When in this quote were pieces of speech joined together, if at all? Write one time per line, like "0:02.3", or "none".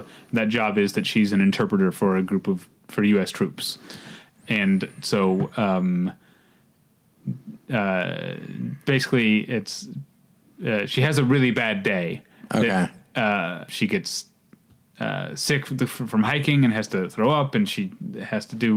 0:13.7